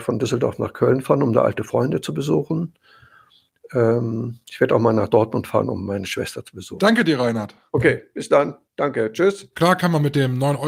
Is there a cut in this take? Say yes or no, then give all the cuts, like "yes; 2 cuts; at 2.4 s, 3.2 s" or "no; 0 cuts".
no; 0 cuts